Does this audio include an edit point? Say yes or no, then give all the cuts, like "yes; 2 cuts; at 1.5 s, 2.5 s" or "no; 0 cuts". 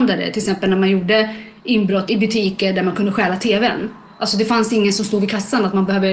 no; 0 cuts